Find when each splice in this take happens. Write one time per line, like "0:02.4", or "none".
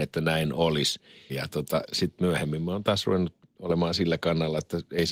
0:01.3